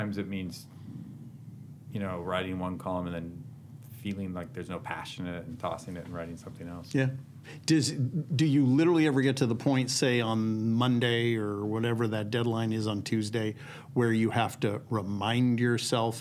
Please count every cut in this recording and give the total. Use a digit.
0